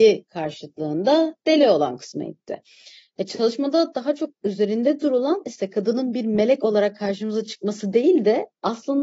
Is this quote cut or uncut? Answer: uncut